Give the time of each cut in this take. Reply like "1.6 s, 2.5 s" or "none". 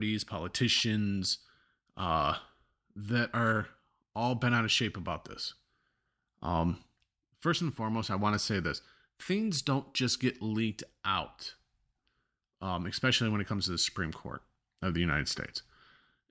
none